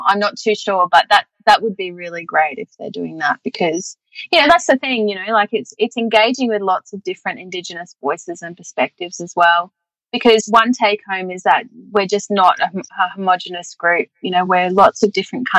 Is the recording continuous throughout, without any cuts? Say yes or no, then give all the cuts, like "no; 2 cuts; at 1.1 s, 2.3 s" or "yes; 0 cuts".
yes; 0 cuts